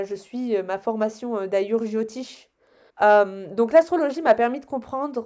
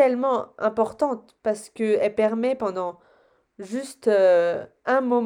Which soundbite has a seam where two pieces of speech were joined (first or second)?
first